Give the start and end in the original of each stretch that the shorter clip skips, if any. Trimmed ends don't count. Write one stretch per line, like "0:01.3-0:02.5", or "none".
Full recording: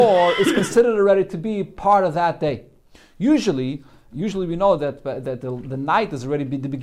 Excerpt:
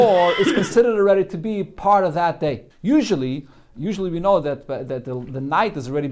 0:02.7-0:03.1